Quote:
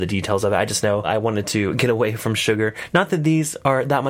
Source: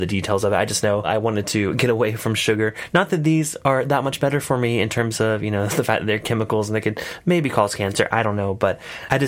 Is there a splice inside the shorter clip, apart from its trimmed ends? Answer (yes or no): no